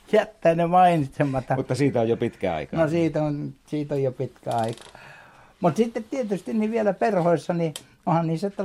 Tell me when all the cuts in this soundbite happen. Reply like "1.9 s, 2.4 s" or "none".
none